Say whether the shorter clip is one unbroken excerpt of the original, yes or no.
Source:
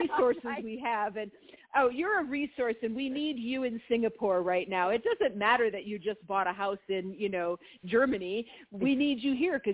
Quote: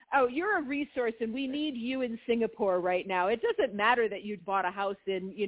no